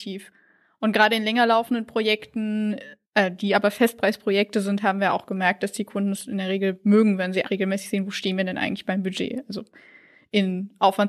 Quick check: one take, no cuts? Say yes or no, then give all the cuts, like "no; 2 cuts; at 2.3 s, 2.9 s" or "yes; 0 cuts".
no; 1 cut; at 7.4 s